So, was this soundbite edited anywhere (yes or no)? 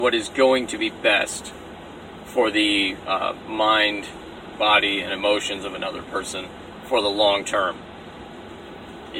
no